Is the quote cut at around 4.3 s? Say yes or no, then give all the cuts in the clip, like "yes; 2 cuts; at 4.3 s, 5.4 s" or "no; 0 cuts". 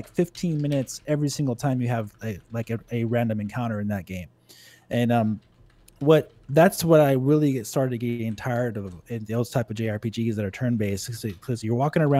no; 0 cuts